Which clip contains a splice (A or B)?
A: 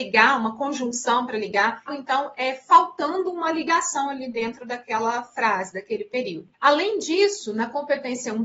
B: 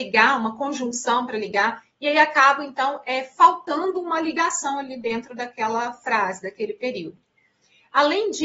A